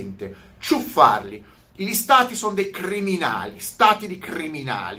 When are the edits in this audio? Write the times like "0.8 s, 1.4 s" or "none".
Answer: none